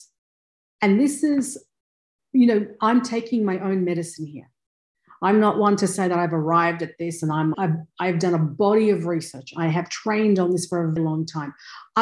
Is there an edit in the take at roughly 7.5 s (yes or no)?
yes